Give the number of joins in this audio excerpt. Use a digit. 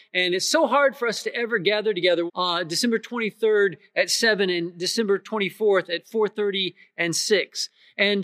1